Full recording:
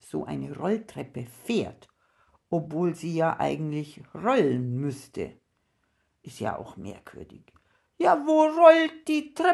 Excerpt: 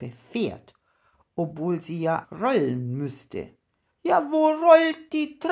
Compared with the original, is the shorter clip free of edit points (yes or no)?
no